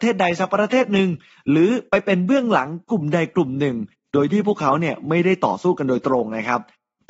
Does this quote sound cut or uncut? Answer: uncut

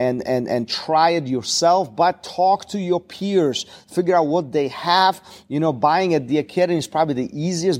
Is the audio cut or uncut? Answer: uncut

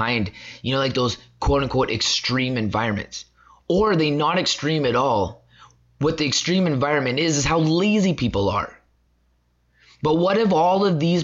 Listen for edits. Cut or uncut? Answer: uncut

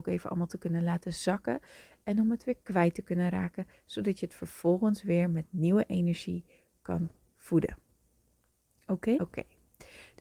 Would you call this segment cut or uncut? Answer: cut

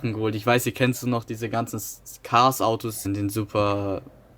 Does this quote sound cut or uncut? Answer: cut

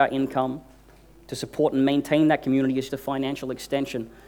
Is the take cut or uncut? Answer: cut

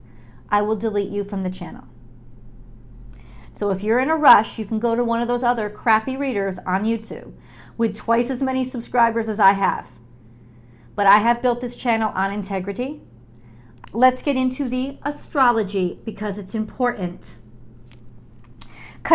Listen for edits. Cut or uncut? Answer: cut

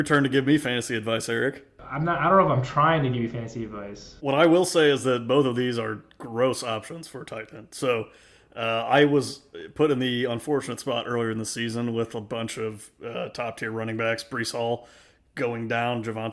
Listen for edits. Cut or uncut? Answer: cut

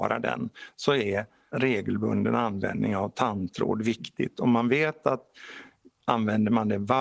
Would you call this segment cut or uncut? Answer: uncut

